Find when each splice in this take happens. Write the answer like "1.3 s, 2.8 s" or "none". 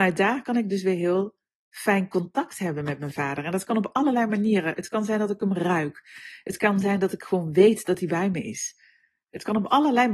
none